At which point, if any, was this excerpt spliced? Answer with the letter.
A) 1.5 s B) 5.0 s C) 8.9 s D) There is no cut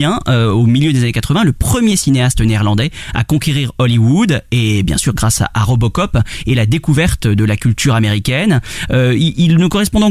C